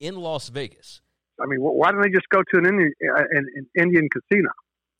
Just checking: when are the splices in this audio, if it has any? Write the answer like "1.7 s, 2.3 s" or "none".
1.3 s